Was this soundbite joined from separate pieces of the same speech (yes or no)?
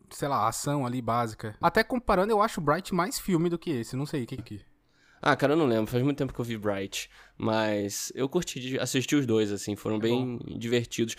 yes